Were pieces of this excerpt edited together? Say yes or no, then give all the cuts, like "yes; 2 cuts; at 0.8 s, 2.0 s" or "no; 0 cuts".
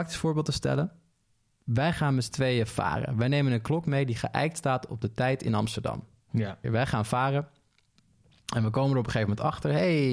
yes; 1 cut; at 6.6 s